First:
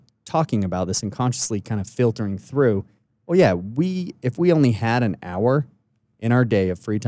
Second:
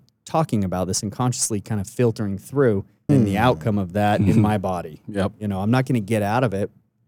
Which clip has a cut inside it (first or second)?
second